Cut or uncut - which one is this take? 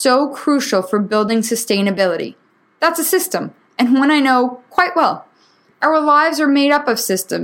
cut